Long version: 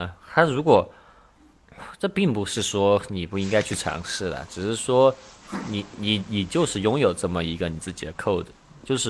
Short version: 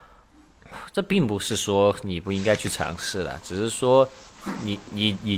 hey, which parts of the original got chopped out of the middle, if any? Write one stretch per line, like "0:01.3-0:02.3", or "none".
none